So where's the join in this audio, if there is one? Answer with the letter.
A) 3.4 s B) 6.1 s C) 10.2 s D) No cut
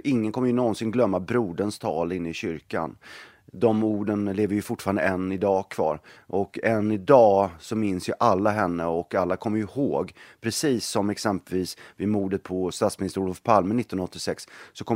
B